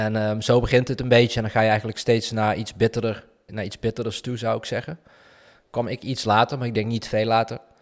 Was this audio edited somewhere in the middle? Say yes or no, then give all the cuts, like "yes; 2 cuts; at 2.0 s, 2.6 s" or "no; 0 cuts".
yes; 2 cuts; at 3.5 s, 5.5 s